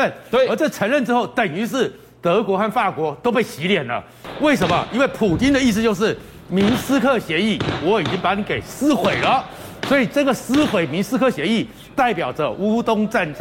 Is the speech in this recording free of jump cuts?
yes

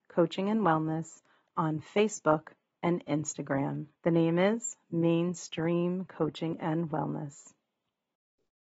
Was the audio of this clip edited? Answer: yes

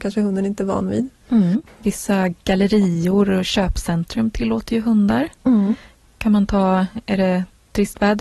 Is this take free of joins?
yes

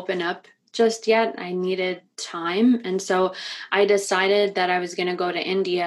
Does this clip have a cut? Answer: no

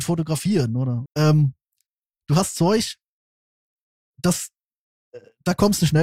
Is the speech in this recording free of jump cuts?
no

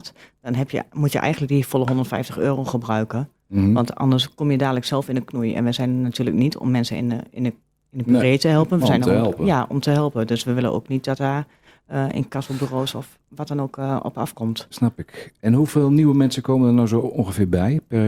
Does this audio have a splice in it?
no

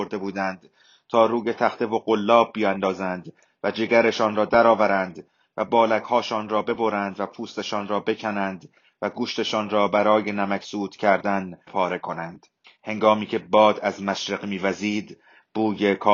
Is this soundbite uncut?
no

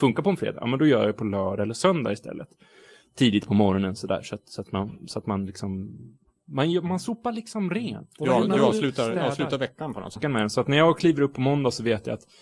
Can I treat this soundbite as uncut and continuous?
no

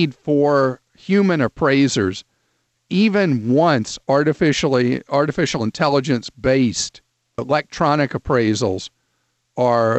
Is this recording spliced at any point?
yes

